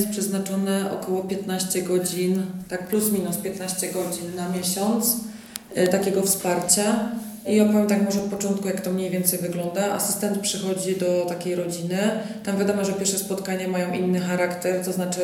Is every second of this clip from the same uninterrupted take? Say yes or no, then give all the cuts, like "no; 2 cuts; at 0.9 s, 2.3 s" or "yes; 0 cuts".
yes; 0 cuts